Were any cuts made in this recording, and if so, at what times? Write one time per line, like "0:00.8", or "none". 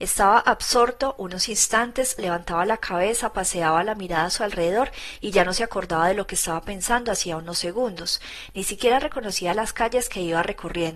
0:02.2